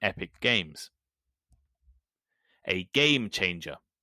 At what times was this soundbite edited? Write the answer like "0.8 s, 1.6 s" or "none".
none